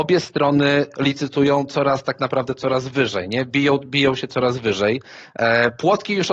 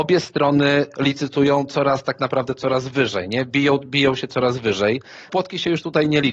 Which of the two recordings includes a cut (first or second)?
second